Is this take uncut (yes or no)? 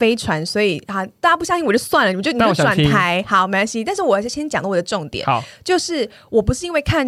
yes